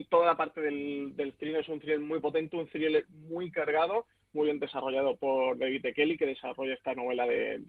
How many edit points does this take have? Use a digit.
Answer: 0